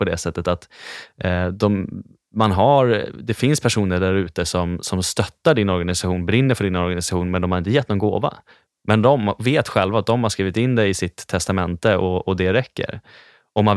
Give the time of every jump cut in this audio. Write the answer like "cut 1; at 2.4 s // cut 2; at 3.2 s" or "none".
none